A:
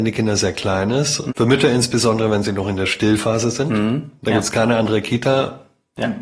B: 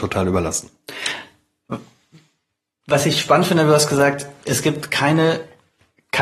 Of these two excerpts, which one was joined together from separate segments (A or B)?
A